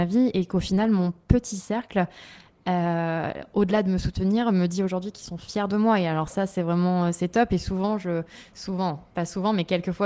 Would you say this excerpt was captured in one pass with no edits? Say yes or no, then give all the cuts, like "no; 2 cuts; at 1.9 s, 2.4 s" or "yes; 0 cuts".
yes; 0 cuts